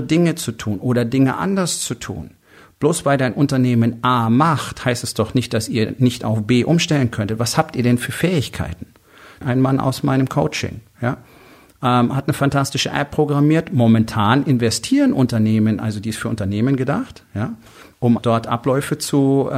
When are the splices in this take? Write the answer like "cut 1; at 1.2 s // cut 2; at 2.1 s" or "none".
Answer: cut 1; at 9.4 s // cut 2; at 18.2 s